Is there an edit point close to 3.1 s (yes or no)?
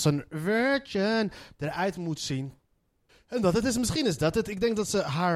yes